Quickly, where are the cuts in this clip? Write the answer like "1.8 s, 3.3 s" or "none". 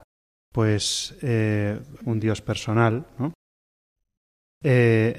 2.0 s